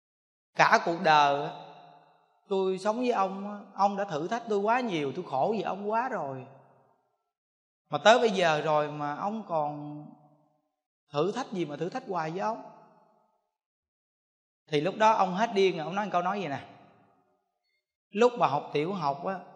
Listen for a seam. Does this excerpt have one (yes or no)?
no